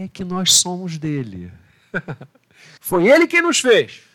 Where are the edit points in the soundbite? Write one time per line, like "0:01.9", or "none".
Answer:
0:02.8